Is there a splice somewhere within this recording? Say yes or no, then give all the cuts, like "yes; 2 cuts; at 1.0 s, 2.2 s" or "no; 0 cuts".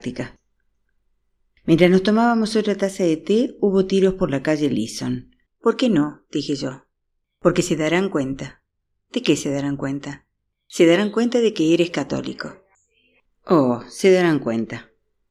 yes; 2 cuts; at 5.5 s, 13.3 s